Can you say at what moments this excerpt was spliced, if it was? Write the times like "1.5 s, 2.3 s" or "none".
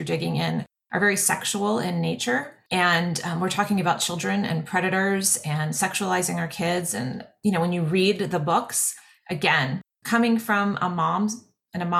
none